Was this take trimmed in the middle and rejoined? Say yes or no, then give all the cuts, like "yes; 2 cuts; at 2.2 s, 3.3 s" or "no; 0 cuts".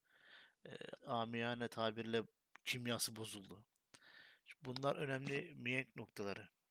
yes; 1 cut; at 1.0 s